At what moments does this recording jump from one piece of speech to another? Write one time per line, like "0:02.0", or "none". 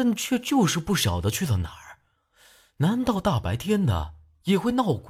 none